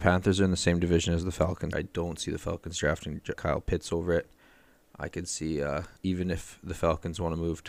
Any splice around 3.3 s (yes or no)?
yes